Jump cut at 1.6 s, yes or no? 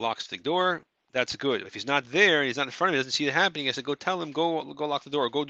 no